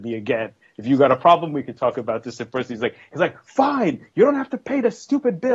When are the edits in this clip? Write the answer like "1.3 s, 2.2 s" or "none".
none